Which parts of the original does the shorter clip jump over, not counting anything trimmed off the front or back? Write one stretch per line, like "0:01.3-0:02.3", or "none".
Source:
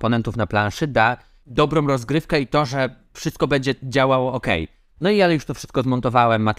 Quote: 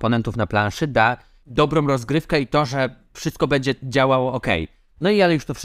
none